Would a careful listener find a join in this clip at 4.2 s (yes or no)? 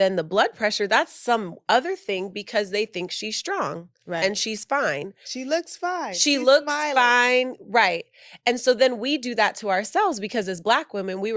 no